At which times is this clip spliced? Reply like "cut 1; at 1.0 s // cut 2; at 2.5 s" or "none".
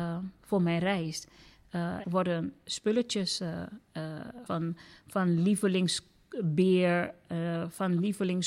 cut 1; at 2.0 s // cut 2; at 4.5 s